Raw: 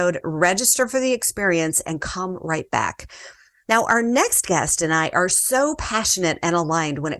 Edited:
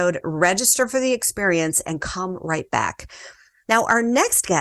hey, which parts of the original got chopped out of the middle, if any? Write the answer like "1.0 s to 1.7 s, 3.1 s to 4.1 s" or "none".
none